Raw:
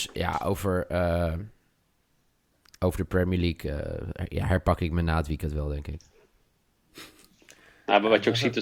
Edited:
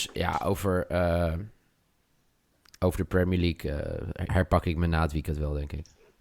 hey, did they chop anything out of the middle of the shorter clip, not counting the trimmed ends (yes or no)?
yes